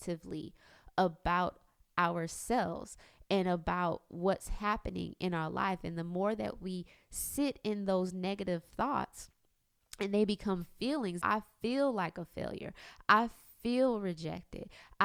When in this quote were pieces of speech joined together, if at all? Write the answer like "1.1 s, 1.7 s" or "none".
11.2 s